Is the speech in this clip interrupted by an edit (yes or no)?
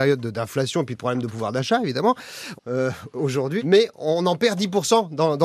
yes